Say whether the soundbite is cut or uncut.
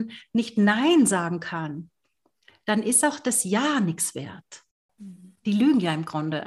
cut